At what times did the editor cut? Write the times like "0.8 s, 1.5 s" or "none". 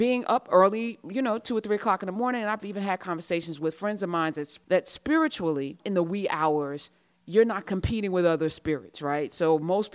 none